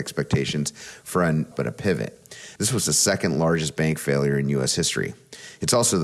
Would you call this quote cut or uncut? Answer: cut